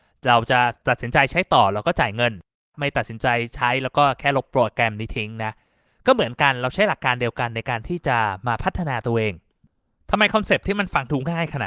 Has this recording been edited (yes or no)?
no